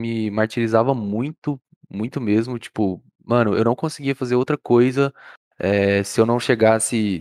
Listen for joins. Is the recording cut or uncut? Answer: uncut